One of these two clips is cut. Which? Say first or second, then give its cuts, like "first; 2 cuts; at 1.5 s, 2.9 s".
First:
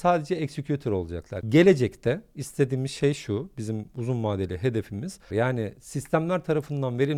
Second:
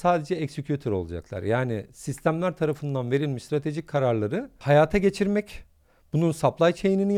first; 2 cuts; at 1.4 s, 5.3 s